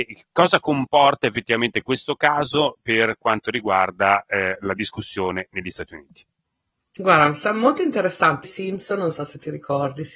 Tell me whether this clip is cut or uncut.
cut